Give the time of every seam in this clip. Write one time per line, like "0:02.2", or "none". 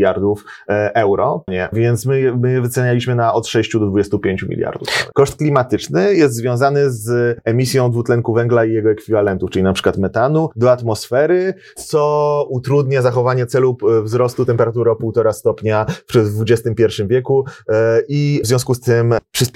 0:01.5
0:05.1